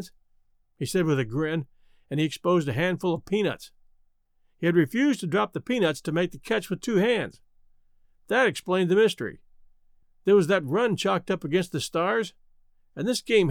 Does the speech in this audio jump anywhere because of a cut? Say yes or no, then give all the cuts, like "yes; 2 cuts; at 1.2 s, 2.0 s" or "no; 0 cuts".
yes; 1 cut; at 10.0 s